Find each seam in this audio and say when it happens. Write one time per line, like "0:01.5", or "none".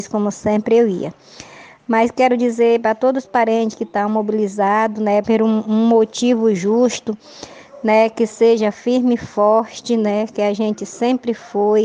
0:05.2